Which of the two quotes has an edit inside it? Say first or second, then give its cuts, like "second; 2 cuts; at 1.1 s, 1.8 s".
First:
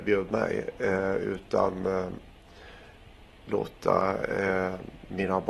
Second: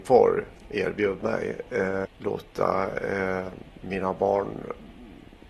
second; 1 cut; at 2.1 s